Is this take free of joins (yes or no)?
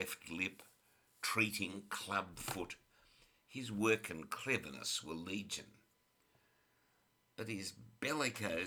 yes